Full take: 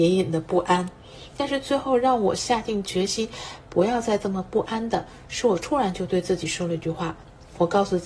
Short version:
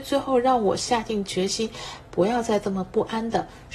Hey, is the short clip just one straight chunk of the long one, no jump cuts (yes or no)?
yes